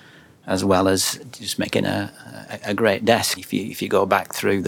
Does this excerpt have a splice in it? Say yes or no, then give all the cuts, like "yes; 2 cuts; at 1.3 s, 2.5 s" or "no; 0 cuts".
yes; 1 cut; at 3.4 s